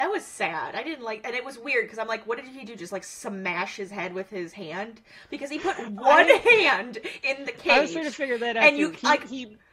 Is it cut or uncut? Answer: uncut